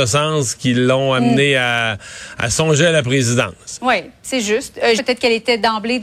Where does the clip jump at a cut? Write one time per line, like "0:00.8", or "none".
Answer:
0:03.8
0:05.0